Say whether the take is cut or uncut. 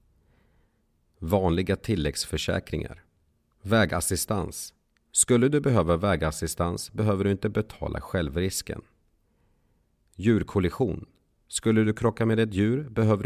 uncut